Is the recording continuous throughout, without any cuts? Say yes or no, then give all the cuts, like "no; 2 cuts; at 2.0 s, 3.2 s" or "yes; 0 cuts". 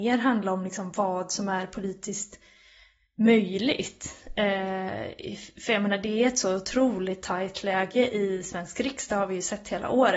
yes; 0 cuts